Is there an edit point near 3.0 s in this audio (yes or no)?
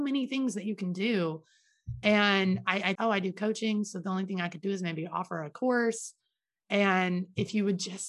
yes